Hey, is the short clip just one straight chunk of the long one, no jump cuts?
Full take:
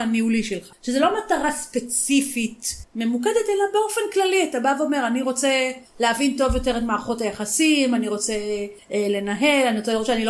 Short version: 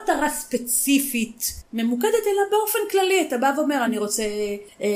no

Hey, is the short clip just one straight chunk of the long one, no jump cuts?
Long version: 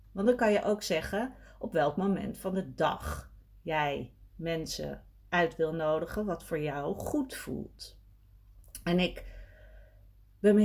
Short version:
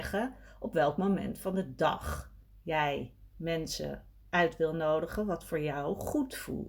yes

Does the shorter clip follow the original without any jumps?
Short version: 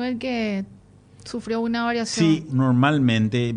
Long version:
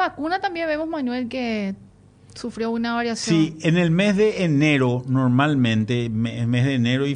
no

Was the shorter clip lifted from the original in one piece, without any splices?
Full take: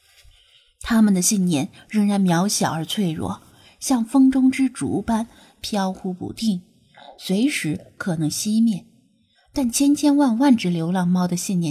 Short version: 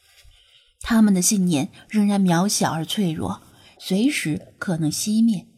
no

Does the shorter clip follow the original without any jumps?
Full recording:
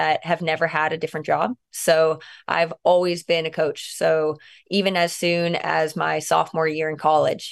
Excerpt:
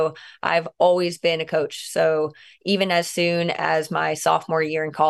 yes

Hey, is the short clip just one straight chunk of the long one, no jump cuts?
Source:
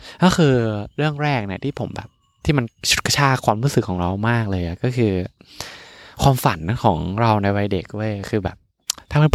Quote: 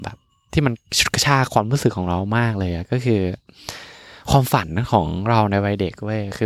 yes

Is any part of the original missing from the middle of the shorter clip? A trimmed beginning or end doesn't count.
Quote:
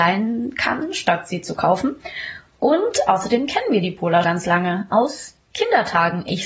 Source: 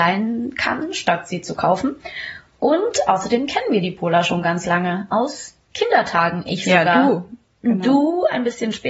yes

